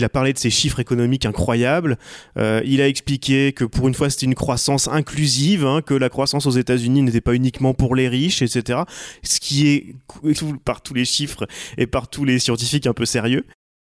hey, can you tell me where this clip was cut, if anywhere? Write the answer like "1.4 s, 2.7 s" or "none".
10.3 s